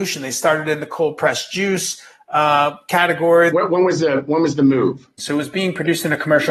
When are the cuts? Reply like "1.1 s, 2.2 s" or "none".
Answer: 3.5 s, 5.2 s